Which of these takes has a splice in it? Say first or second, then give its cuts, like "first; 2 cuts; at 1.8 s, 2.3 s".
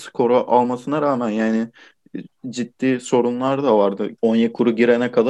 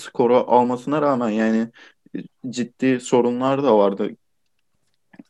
first; 1 cut; at 4.2 s